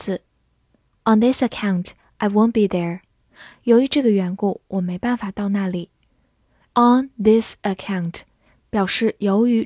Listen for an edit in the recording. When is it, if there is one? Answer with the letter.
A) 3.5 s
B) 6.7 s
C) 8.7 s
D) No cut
B